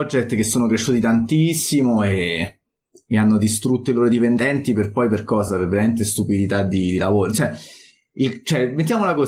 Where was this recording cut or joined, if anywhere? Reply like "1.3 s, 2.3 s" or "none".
none